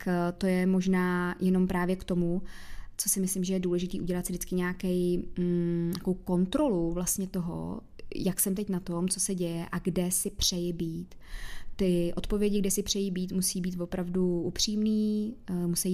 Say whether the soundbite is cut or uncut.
uncut